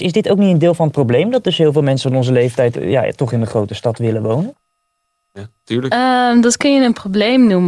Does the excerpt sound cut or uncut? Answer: cut